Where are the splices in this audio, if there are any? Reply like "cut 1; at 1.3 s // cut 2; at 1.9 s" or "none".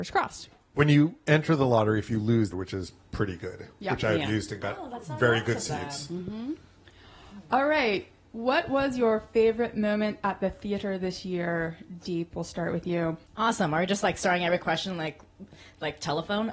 cut 1; at 2.5 s // cut 2; at 13.3 s